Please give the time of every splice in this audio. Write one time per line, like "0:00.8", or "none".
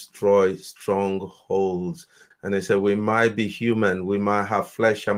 0:02.3